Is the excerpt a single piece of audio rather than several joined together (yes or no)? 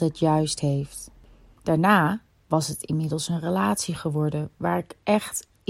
no